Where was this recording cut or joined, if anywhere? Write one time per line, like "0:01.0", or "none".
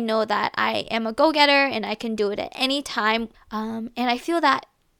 0:03.3